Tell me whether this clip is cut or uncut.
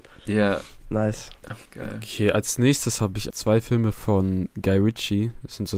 cut